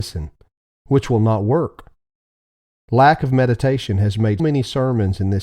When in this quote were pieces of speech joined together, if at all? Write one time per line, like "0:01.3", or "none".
0:04.4